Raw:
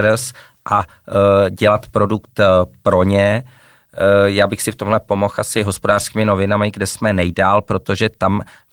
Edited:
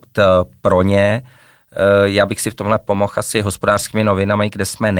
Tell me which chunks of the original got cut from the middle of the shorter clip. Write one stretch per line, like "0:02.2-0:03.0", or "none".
none